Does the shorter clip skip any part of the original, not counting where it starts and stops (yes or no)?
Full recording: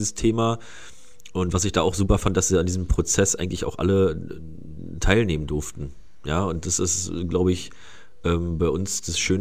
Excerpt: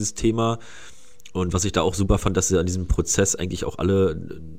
no